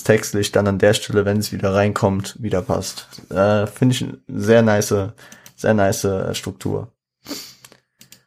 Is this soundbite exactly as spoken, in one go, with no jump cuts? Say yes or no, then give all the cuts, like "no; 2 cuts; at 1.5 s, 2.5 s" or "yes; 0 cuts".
yes; 0 cuts